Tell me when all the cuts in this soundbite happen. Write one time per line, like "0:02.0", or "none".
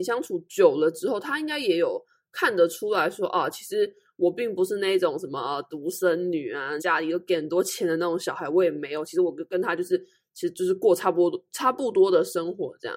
0:06.8